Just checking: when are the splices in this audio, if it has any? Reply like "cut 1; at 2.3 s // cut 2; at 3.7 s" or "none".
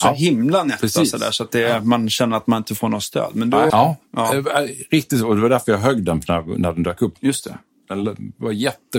cut 1; at 3.7 s // cut 2; at 7.2 s